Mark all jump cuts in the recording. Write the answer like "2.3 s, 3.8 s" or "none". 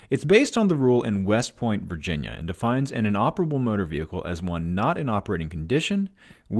none